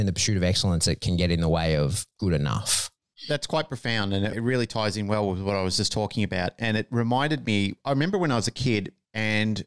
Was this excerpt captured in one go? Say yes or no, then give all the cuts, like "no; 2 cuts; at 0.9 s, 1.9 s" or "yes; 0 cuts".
yes; 0 cuts